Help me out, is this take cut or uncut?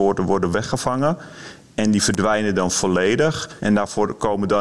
cut